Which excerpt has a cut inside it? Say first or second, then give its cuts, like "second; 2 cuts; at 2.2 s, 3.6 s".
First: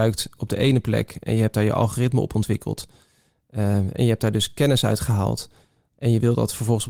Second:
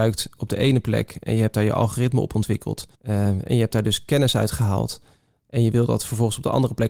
second; 1 cut; at 2.9 s